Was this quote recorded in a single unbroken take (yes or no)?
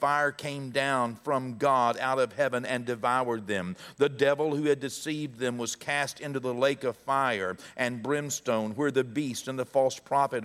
yes